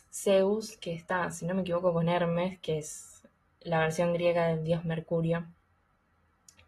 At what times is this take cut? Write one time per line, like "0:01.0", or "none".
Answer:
none